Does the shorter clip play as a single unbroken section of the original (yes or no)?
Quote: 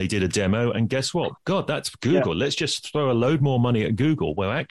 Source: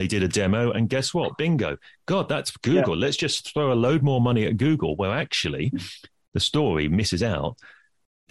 no